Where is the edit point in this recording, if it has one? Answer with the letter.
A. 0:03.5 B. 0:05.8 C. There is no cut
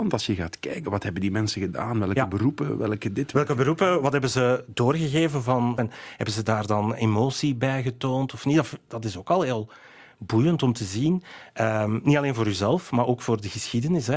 B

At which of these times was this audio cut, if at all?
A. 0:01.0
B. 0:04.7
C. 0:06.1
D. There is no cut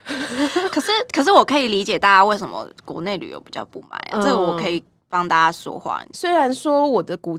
C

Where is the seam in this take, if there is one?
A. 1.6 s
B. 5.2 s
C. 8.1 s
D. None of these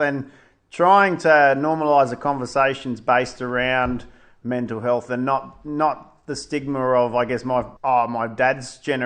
D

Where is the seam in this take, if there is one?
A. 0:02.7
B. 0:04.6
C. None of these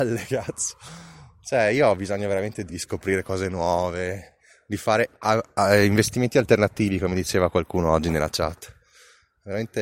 A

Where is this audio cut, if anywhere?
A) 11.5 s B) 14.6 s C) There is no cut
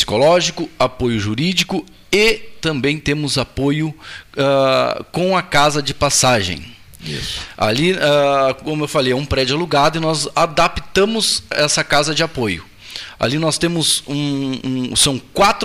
A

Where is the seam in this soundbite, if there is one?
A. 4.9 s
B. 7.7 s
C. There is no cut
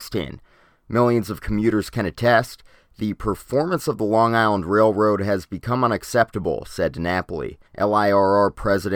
B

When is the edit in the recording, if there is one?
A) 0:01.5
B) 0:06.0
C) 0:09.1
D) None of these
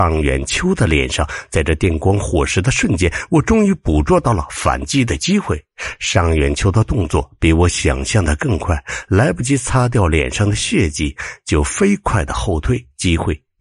D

